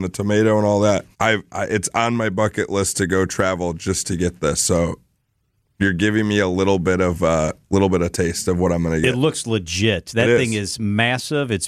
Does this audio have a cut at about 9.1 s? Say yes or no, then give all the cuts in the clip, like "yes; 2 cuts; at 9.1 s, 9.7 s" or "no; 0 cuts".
no; 1 cut; at 1.1 s